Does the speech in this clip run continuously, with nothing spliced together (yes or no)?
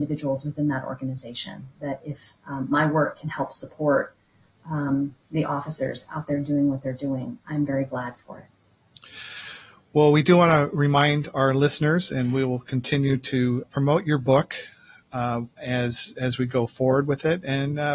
no